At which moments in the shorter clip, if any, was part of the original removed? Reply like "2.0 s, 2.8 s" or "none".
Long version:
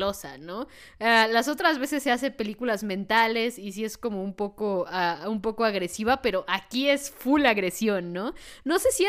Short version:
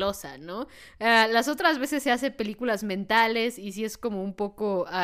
none